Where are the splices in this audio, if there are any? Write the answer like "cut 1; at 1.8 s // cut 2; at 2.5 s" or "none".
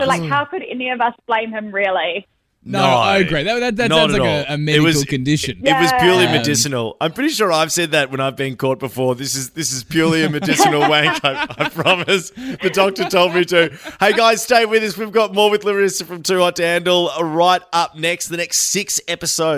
none